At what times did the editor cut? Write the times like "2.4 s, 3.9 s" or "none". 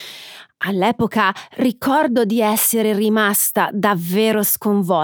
none